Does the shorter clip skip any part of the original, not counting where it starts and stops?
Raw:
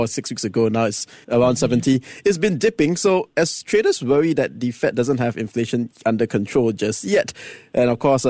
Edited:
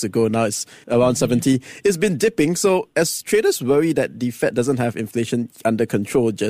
no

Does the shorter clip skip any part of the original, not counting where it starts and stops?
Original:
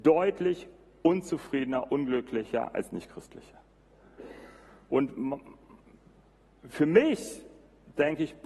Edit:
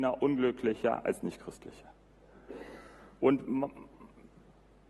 no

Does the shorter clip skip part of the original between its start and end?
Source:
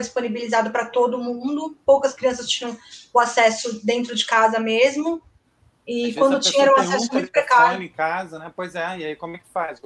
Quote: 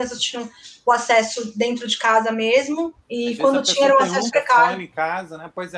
yes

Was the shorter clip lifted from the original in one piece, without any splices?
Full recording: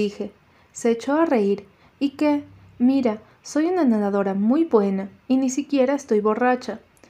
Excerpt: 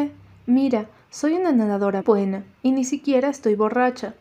no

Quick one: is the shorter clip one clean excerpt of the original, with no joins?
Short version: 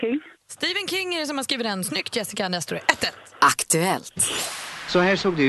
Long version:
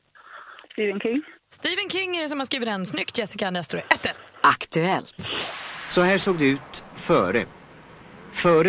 yes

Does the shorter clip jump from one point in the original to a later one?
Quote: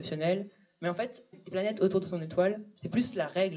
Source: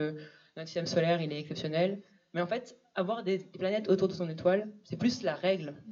yes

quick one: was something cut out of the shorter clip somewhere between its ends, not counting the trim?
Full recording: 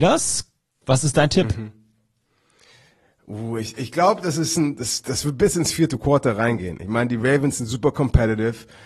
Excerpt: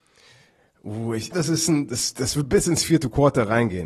yes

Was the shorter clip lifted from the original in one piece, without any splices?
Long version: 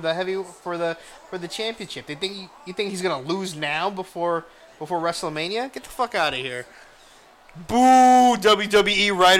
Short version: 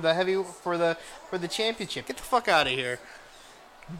no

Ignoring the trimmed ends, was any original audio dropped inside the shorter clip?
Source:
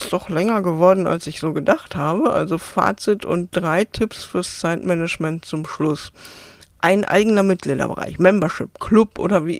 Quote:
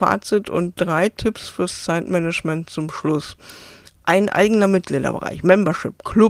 no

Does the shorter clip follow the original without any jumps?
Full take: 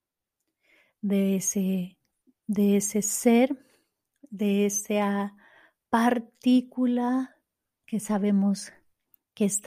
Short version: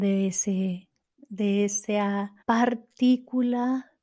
no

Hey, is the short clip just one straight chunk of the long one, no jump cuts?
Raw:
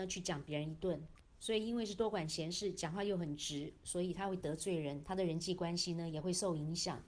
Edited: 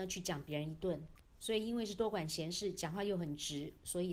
yes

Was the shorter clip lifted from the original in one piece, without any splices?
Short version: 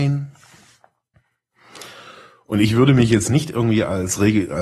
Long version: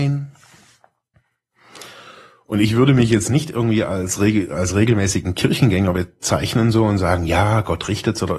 yes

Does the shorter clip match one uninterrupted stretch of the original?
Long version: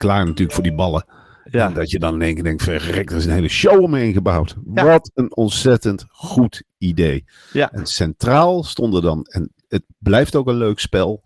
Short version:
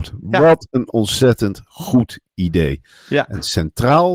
yes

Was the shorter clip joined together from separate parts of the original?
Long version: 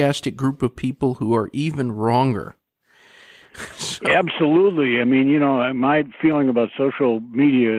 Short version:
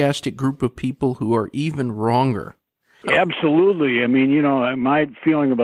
yes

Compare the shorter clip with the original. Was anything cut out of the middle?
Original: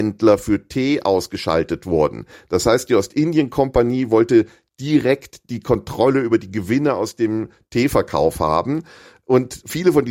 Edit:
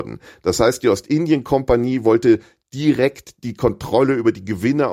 no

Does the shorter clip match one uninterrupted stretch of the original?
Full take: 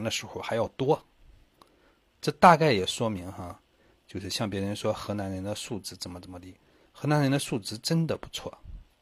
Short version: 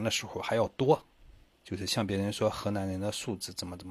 no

